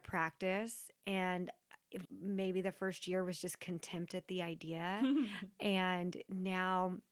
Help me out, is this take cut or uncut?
cut